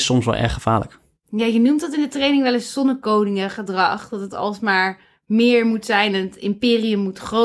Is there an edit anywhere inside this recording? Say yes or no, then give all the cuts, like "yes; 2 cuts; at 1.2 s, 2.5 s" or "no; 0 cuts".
no; 0 cuts